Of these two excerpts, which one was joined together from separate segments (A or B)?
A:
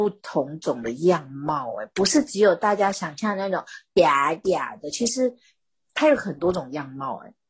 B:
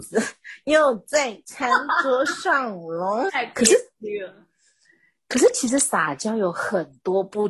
B